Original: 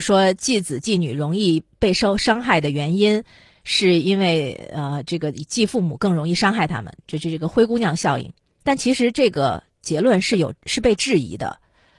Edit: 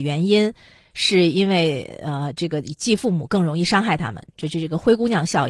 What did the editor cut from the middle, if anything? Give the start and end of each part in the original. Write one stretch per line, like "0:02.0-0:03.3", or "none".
none